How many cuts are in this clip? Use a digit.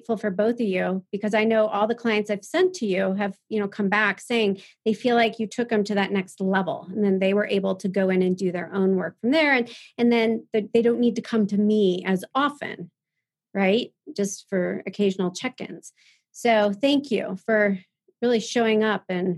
0